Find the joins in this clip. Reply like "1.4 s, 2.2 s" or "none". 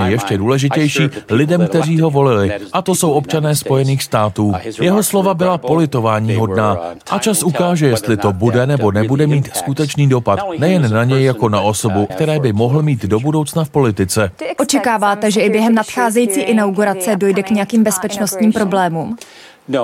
7.0 s, 12.1 s